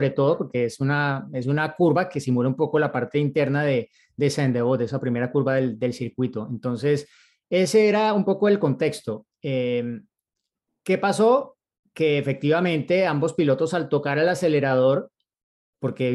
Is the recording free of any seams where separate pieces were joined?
yes; 0 cuts

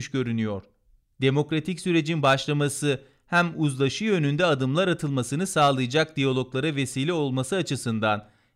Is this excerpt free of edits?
no; 1 cut; at 1.0 s

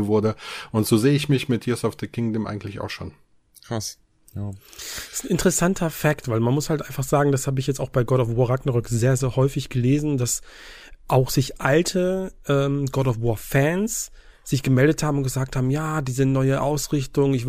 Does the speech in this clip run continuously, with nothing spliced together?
yes; 0 cuts

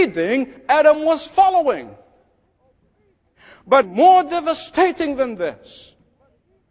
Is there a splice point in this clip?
yes; 1 cut; at 3.8 s

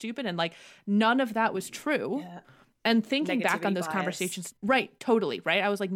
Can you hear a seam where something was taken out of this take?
yes; 1 cut; at 4.5 s

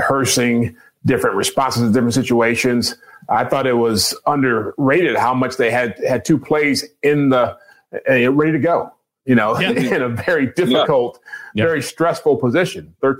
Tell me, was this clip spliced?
no; 0 cuts

